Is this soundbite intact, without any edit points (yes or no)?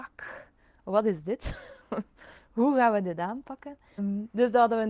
no